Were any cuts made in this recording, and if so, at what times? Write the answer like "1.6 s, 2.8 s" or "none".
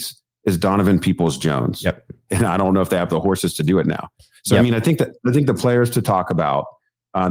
2.3 s